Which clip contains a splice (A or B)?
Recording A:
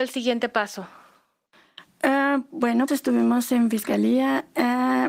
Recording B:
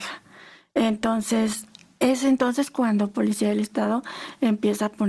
A